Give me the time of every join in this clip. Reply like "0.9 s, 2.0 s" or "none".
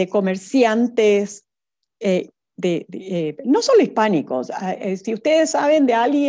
none